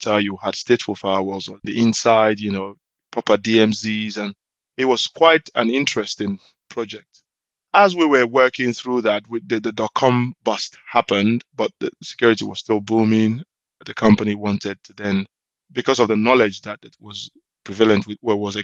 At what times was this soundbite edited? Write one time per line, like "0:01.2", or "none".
none